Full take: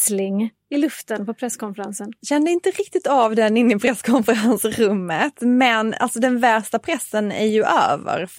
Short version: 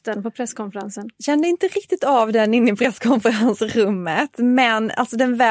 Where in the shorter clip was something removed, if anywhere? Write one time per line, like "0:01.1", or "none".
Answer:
none